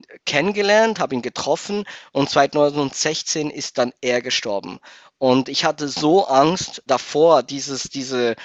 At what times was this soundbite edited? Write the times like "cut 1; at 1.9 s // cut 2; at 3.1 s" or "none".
cut 1; at 6.9 s